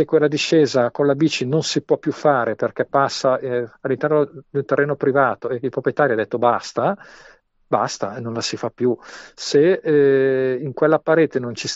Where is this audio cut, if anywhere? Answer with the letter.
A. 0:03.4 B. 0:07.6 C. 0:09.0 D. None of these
D